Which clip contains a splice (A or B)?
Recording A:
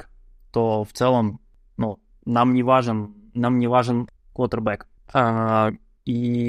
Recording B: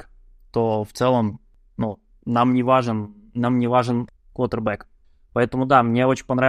A